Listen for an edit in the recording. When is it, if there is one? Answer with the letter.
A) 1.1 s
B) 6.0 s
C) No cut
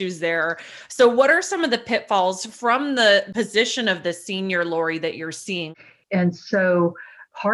B